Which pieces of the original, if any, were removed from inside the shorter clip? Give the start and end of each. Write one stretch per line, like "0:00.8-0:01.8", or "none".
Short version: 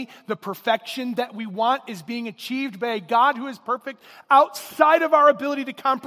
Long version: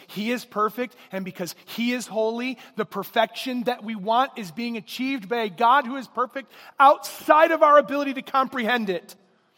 none